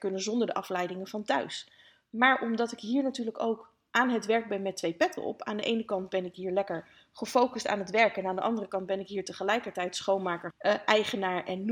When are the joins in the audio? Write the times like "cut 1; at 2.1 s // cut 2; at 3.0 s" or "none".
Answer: cut 1; at 10.5 s